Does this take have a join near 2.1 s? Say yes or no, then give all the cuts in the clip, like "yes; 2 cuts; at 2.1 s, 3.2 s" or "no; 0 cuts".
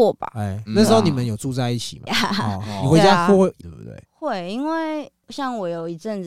yes; 2 cuts; at 2.1 s, 3.6 s